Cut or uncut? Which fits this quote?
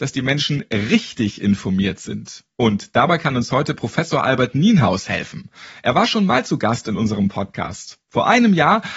uncut